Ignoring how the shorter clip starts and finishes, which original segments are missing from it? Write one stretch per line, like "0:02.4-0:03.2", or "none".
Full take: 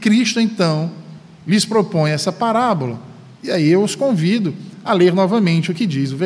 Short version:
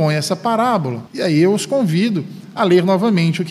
0:03.0-0:03.4